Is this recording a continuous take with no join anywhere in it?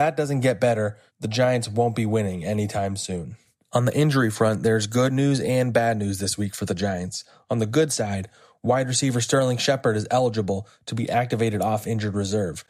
yes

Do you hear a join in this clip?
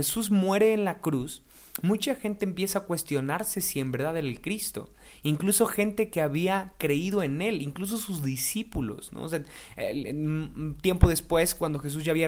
yes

